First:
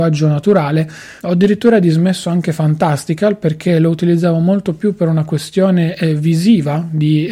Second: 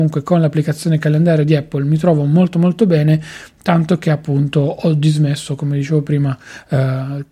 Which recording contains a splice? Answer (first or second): first